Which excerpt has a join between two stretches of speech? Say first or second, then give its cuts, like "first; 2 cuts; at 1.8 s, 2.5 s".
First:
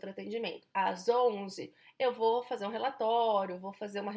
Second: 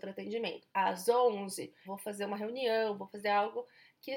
second; 1 cut; at 1.8 s